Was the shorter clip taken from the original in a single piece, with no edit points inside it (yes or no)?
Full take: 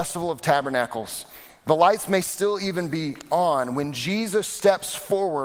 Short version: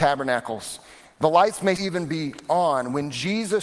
no